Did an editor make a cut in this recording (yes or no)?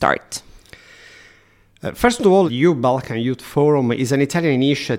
yes